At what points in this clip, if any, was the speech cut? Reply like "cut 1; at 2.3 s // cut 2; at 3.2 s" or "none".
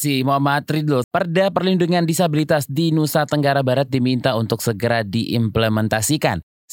cut 1; at 1.0 s